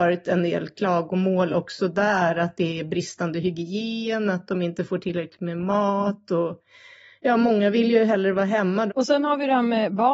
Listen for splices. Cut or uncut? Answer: cut